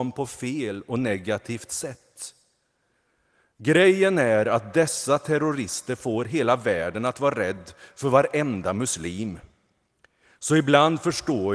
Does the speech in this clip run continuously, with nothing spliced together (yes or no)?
yes